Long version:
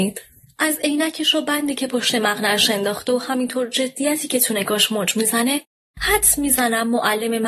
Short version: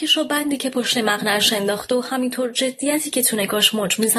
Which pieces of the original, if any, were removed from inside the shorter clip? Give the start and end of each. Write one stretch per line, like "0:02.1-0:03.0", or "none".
none